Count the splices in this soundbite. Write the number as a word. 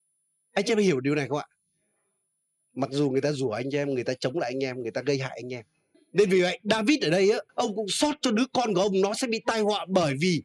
three